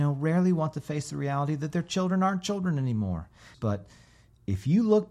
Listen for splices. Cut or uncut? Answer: cut